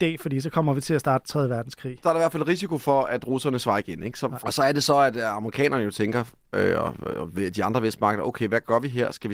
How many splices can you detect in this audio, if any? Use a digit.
1